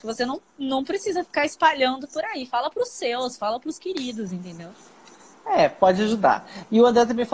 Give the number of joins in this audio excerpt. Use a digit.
0